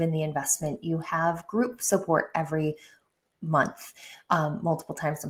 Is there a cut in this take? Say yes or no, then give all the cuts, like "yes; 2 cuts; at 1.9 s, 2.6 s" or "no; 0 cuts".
no; 0 cuts